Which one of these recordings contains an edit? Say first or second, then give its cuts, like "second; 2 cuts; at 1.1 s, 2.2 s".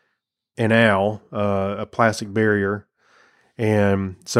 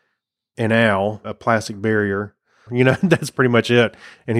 second; 2 cuts; at 1.2 s, 2.7 s